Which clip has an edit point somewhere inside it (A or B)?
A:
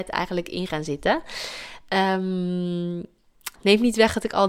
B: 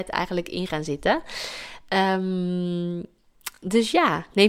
A